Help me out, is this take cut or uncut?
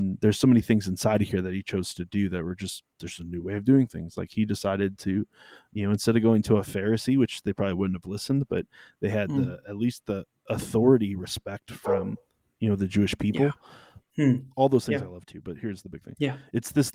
cut